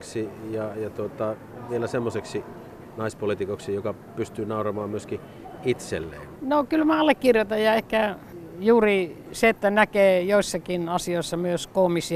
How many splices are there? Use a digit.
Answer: 1